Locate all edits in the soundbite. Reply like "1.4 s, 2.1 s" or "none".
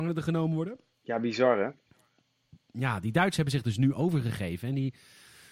none